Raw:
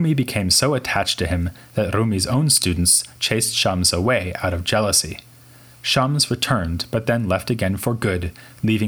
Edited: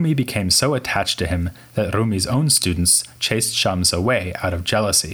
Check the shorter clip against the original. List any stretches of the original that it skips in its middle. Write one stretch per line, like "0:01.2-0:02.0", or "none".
none